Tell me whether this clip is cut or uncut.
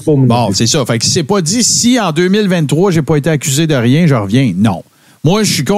uncut